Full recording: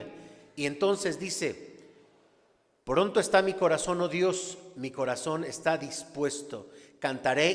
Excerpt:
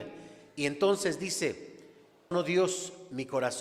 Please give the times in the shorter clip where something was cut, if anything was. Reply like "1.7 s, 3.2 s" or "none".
2.3 s